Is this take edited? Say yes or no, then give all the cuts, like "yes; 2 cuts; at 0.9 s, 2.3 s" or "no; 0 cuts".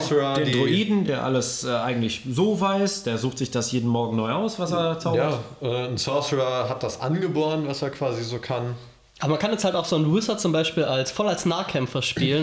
no; 0 cuts